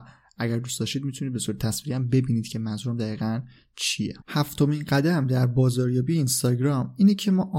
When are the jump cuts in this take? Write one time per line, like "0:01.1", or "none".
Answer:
0:04.2